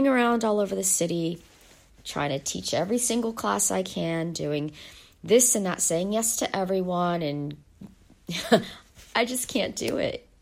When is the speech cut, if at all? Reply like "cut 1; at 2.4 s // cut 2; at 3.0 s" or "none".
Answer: none